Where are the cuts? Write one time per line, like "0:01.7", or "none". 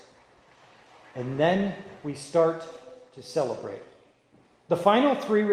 none